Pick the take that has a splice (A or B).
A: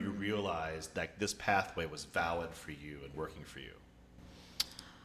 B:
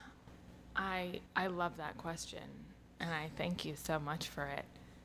B